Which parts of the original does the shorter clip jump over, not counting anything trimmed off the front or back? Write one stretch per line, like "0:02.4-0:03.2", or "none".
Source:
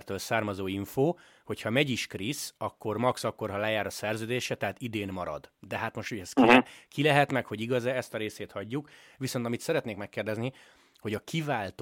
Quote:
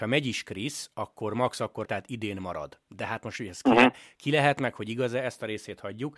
0:03.5-0:04.6